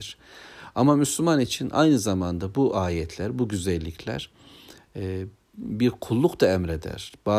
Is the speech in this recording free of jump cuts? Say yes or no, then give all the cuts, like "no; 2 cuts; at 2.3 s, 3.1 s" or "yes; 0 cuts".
yes; 0 cuts